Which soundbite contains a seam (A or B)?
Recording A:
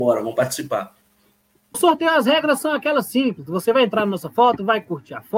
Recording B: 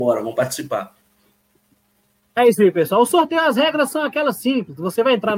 A